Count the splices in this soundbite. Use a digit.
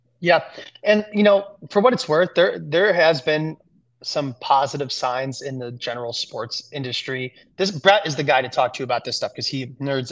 0